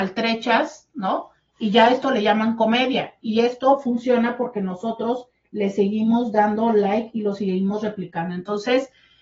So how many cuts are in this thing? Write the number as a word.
zero